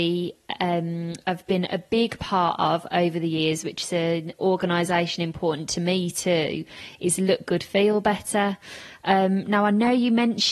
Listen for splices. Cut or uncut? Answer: uncut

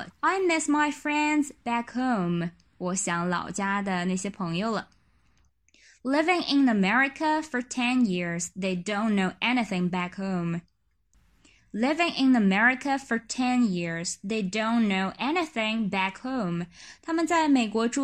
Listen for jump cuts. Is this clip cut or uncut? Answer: uncut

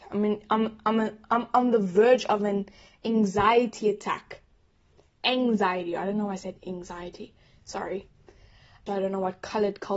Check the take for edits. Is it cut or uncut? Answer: cut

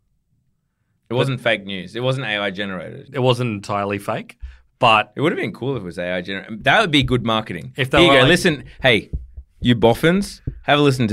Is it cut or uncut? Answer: uncut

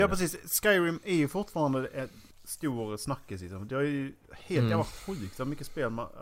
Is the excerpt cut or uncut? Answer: cut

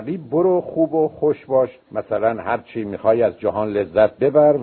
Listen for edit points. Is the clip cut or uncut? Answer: cut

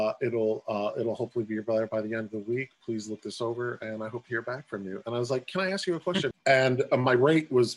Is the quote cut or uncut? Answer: cut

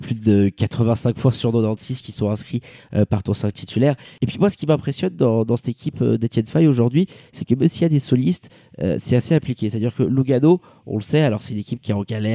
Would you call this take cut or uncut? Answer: uncut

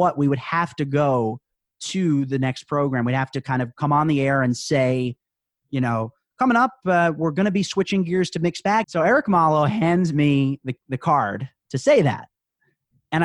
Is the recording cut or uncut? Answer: cut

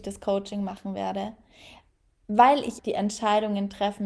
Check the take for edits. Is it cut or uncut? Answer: cut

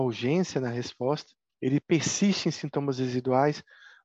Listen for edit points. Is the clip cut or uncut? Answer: cut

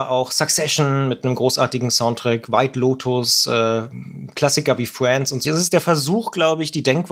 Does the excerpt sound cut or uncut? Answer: cut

